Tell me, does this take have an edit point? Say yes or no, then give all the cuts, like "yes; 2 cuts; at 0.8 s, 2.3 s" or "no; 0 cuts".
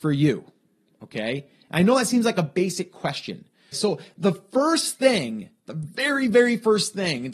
yes; 1 cut; at 3.7 s